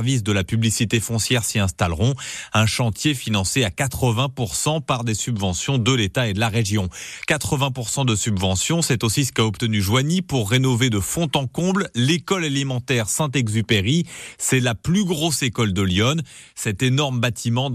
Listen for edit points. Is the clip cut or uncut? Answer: uncut